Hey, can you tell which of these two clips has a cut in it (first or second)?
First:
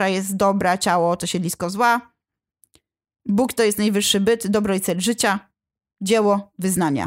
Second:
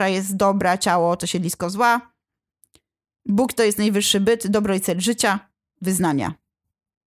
second